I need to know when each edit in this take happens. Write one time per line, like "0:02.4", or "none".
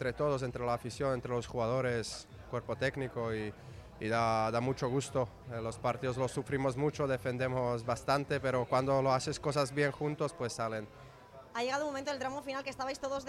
none